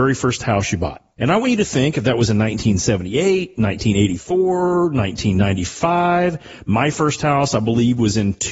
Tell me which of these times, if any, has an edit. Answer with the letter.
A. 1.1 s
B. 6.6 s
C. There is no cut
C